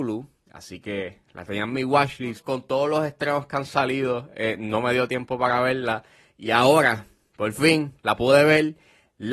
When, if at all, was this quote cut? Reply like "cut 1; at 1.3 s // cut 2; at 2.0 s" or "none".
none